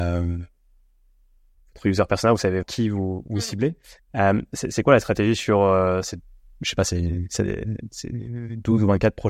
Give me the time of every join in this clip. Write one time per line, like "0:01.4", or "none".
0:02.6